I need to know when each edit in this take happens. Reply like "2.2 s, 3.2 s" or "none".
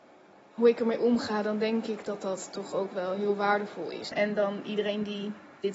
4.1 s